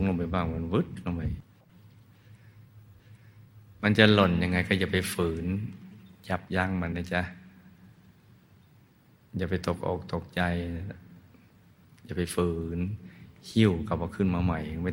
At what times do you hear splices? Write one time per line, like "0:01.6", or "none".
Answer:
0:06.9